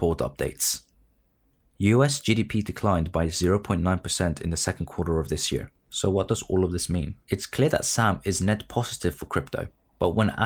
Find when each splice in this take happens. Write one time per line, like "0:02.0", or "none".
0:05.8
0:07.2